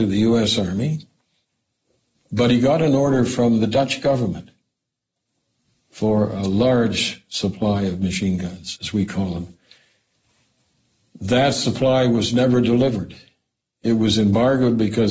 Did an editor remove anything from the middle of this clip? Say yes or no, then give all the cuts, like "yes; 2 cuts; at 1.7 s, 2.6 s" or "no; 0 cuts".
yes; 1 cut; at 8.8 s